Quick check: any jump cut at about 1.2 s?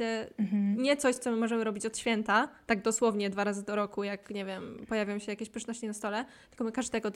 no; 0 cuts

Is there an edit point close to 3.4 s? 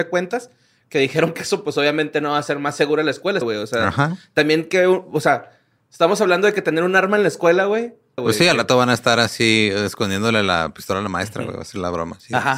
yes; 2 cuts; at 3.4 s, 8.2 s

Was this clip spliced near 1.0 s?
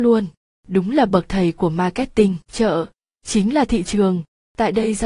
no; 1 cut; at 2.4 s

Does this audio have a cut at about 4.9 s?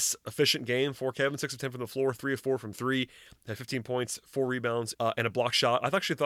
yes; 1 cut; at 4.9 s

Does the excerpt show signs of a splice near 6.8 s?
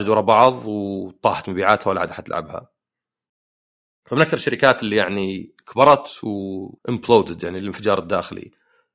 yes; 1 cut; at 6.8 s

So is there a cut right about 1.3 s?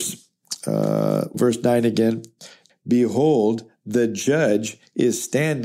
yes; 2 cuts; at 1.3 s, 2.7 s

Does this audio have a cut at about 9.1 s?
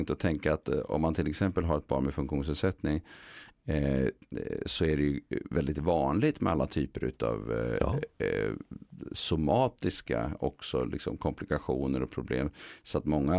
no; 0 cuts

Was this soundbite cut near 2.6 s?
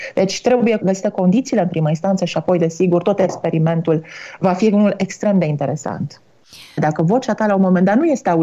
no; 1 cut; at 6.8 s

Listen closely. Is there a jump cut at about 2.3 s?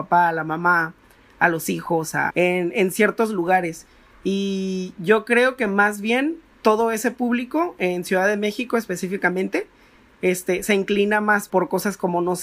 yes; 2 cuts; at 2.3 s, 11.5 s

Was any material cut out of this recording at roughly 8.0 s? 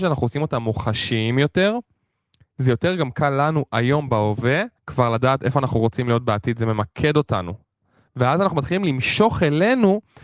no; 1 cut; at 4.8 s

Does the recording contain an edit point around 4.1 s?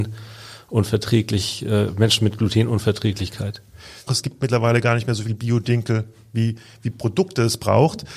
yes; 1 cut; at 4.1 s

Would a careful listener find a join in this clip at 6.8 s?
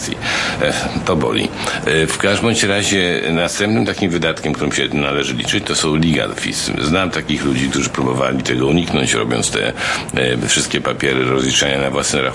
no; 0 cuts

